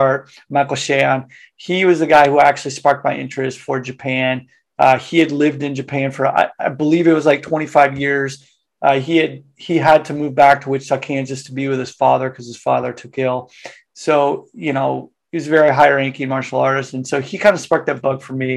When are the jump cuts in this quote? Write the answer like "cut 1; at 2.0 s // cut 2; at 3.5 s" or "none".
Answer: none